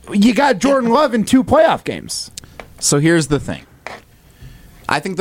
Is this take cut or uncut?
uncut